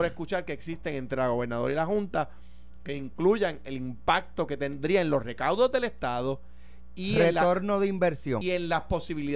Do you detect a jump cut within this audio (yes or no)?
yes